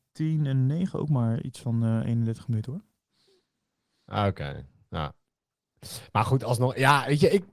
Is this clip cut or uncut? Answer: uncut